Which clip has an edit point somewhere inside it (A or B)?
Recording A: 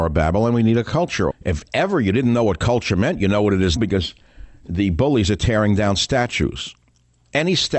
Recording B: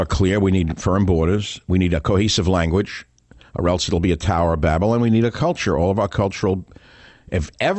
A